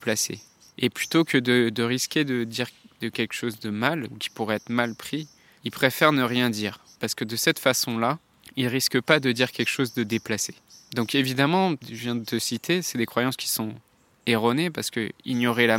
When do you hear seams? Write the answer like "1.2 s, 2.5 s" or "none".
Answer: 11.8 s